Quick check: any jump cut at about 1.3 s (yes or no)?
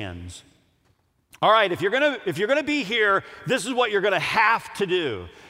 no